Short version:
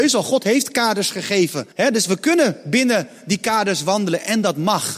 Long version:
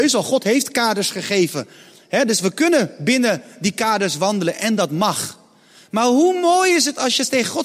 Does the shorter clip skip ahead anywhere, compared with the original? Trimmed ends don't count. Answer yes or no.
yes